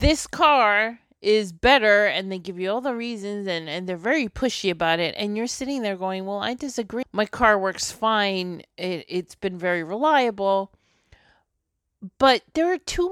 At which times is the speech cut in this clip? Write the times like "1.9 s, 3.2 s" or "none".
7.0 s